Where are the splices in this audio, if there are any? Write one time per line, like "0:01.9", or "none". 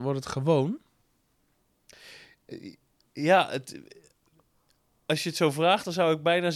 none